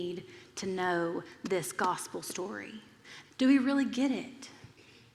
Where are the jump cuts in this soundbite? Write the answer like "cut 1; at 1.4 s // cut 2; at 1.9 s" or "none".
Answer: cut 1; at 3.2 s